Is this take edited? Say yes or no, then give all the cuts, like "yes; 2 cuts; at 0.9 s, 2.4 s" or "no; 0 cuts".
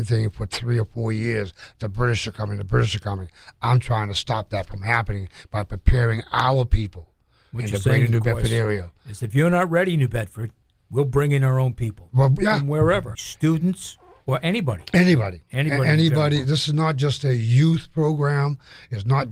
yes; 1 cut; at 13.2 s